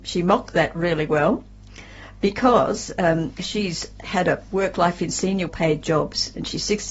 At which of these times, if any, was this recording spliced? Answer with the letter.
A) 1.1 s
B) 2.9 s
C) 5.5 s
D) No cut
C